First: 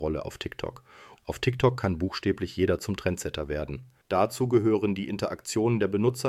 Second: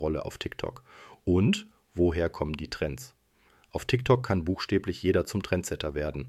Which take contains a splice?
first; 2 cuts; at 1.2 s, 4.0 s

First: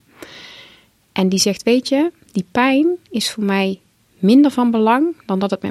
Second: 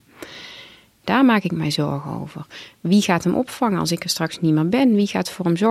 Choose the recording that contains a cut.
second; 1 cut; at 1.0 s

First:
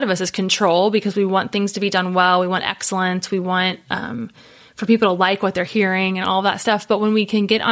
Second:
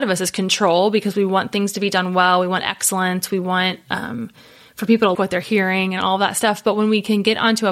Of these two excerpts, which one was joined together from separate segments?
second; 1 cut; at 5.1 s

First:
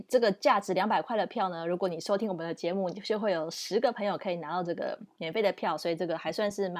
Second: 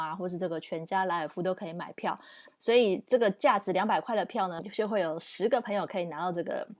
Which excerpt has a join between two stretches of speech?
second; 2 cuts; at 2.5 s, 4.6 s

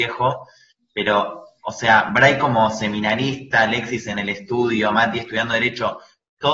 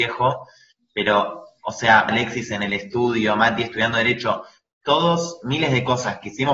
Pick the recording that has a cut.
second; 1 cut; at 2.1 s

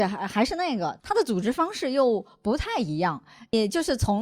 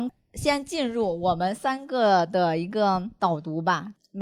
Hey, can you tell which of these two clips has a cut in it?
first; 1 cut; at 1.0 s

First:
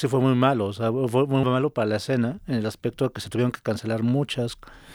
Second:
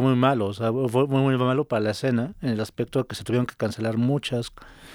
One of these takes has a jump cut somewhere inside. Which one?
first; 1 cut; at 1.4 s

